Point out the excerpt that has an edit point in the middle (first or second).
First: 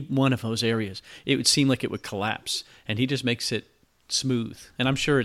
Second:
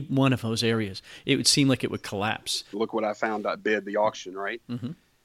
second